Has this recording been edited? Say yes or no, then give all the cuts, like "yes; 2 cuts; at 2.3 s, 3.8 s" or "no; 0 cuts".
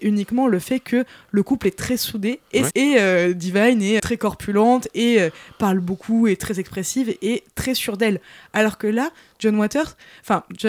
yes; 2 cuts; at 2.7 s, 4.0 s